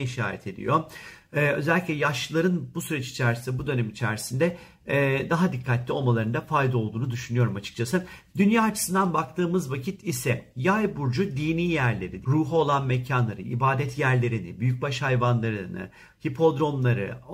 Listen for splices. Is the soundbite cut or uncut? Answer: cut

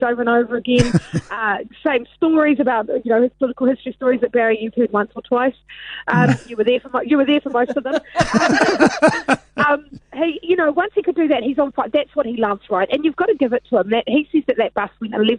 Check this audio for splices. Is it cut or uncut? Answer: uncut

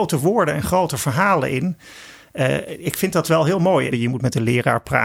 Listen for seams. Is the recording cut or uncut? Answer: cut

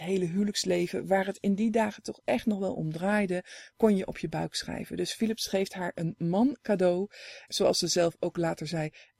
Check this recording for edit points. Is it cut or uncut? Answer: cut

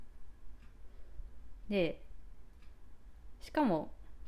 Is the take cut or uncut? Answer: uncut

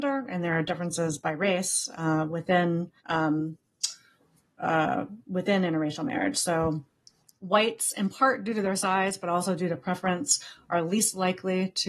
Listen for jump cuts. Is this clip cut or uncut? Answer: cut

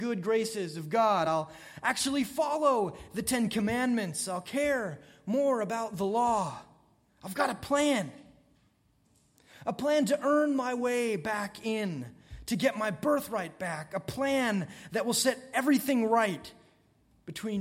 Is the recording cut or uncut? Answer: uncut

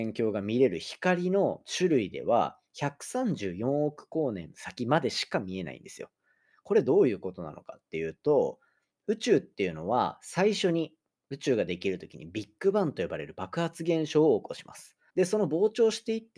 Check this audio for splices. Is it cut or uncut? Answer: cut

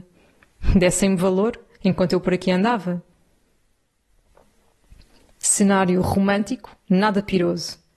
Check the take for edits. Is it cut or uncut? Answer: uncut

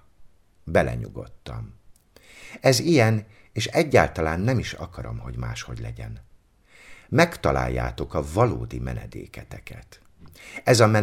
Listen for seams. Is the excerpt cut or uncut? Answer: uncut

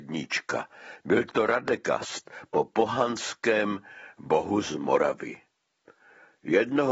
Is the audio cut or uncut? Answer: uncut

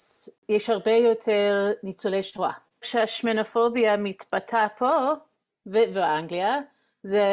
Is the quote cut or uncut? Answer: cut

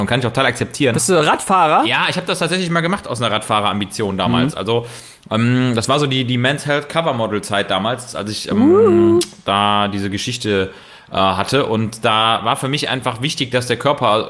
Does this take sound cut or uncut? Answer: cut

